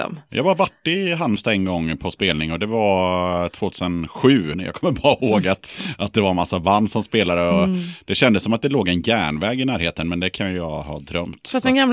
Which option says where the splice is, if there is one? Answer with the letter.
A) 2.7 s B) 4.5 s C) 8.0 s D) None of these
B